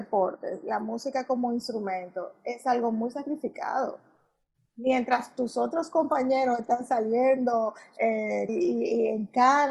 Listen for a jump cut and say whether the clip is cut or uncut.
cut